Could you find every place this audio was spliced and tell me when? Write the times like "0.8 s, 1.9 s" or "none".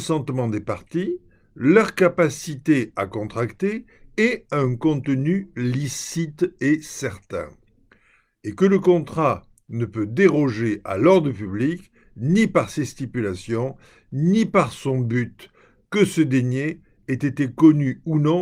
none